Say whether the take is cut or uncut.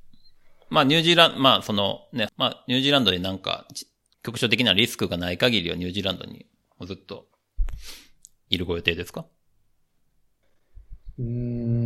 cut